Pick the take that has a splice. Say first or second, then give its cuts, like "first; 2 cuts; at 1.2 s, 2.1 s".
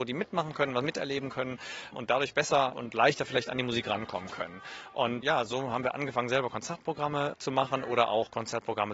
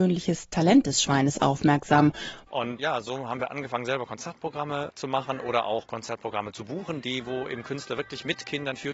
second; 1 cut; at 2.5 s